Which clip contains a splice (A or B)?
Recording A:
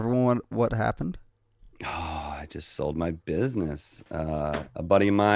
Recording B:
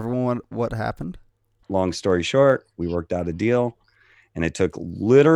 B